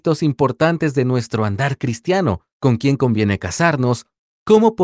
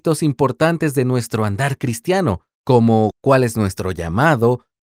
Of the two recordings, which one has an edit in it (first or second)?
first